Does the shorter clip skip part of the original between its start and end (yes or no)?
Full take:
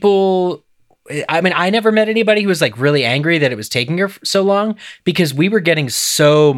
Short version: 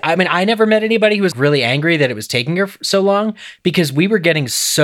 yes